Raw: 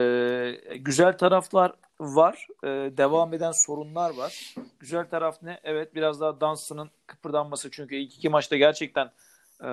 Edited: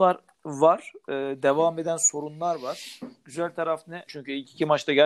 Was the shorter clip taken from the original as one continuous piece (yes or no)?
no